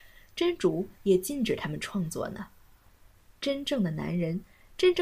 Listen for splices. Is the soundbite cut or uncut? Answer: uncut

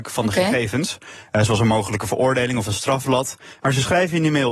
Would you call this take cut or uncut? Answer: cut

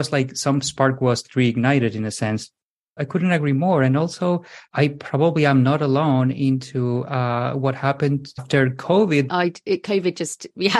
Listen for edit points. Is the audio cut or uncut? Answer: cut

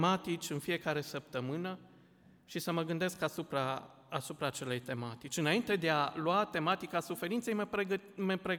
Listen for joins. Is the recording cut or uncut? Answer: uncut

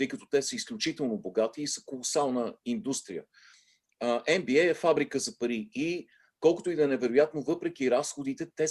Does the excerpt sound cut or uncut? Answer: uncut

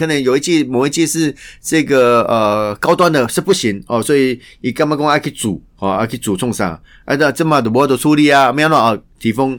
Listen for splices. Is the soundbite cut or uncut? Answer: uncut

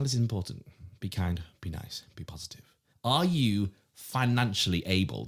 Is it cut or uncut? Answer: cut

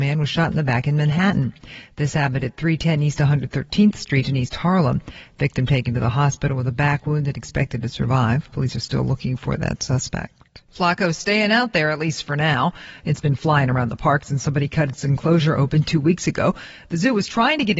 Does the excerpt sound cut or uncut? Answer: cut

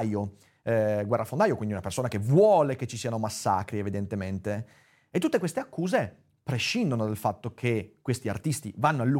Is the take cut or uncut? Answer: uncut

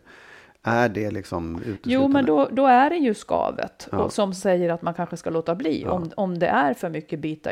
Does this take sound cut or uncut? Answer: uncut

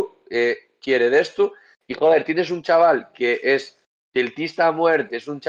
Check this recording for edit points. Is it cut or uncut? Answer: uncut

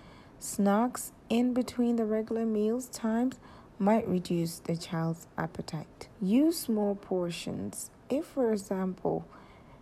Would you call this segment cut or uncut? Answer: cut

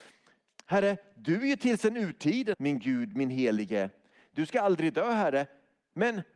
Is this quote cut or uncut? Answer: cut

